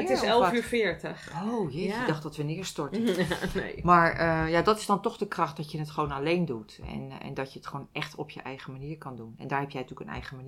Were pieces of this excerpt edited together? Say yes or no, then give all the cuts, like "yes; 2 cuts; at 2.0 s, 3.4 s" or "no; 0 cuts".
no; 0 cuts